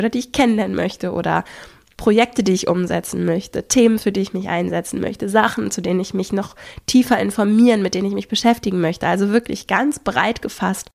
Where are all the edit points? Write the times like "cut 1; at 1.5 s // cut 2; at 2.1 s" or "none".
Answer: none